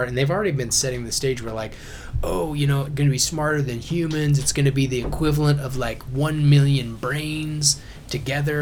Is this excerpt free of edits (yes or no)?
no